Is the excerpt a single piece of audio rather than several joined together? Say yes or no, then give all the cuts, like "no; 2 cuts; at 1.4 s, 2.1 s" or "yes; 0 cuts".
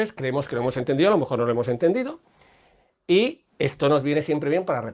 yes; 0 cuts